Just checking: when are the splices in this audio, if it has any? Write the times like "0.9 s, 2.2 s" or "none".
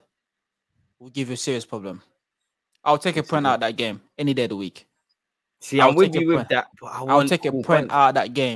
none